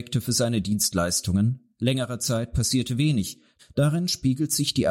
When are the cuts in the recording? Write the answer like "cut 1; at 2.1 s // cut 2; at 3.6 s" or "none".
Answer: cut 1; at 3.6 s